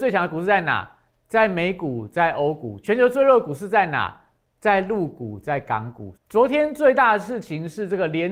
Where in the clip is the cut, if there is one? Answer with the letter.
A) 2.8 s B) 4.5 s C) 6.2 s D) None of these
C